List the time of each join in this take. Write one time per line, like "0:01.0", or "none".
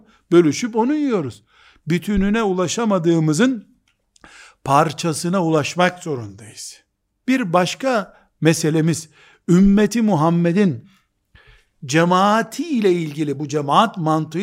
0:07.2